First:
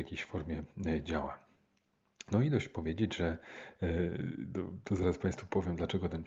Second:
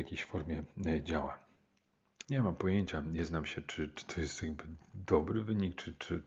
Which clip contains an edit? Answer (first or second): second